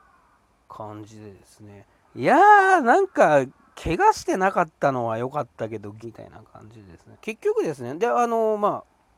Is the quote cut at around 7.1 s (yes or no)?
yes